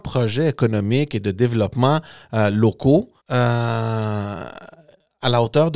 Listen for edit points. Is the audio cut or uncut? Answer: cut